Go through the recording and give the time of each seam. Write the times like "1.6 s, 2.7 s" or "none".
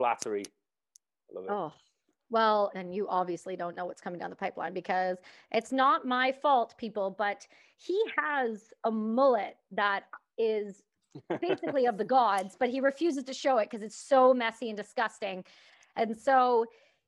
2.7 s